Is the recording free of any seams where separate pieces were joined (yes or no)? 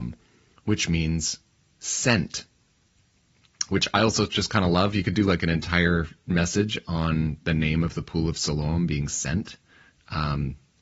yes